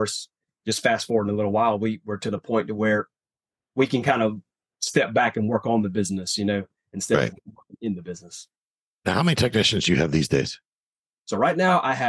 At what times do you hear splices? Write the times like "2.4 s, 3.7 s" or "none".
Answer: none